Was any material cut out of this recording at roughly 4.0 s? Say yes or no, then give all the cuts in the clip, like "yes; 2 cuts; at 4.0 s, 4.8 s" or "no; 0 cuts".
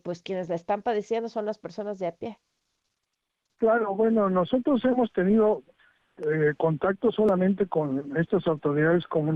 no; 0 cuts